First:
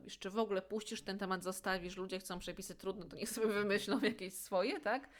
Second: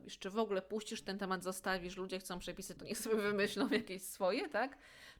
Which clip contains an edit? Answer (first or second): second